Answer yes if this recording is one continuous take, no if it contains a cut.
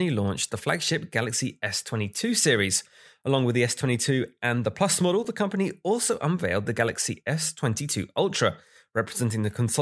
yes